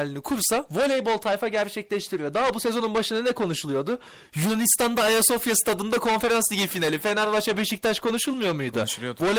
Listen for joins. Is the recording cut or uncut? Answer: uncut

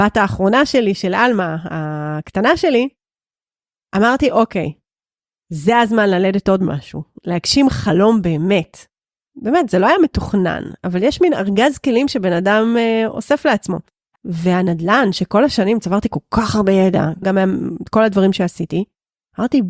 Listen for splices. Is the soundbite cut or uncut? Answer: cut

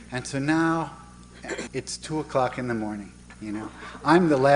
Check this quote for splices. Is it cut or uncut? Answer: cut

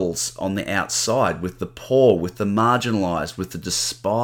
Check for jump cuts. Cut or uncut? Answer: uncut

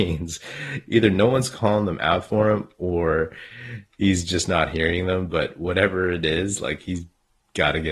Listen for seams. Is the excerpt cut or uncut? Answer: uncut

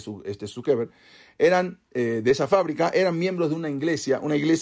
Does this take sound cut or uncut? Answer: uncut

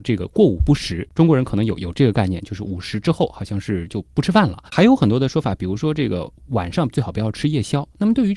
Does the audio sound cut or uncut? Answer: cut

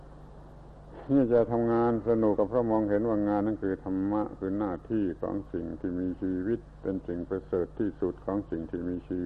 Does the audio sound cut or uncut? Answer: cut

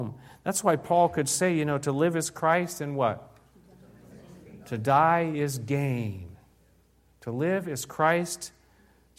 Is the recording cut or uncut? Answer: uncut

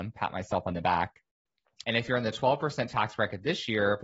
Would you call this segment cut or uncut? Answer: cut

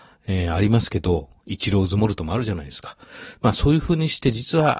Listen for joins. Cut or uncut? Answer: uncut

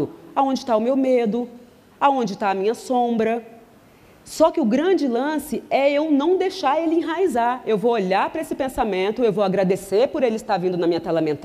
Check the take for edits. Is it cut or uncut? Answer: uncut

